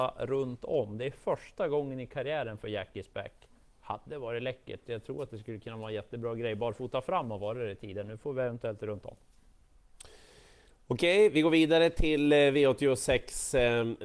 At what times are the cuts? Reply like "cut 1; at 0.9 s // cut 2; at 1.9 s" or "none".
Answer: none